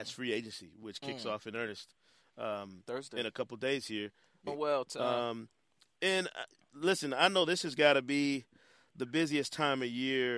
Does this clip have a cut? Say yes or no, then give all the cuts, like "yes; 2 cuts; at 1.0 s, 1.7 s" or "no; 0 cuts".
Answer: yes; 1 cut; at 4.5 s